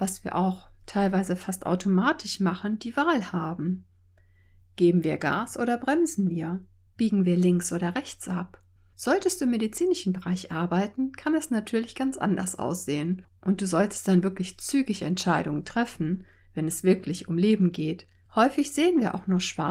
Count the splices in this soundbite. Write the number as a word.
three